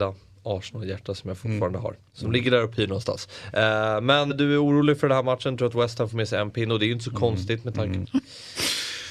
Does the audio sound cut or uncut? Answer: cut